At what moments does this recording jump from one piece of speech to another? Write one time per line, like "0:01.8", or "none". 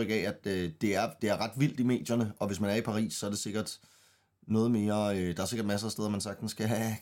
none